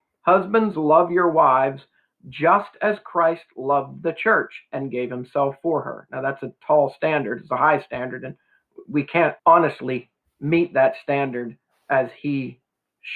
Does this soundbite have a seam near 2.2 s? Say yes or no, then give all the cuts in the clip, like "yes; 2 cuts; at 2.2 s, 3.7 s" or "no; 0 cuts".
no; 1 cut; at 9.4 s